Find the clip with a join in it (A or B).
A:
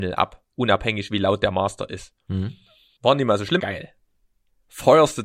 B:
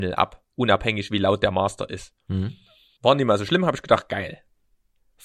A